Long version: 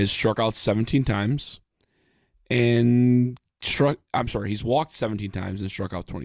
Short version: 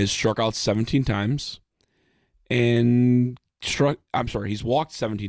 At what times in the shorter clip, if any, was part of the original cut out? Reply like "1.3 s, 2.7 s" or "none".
none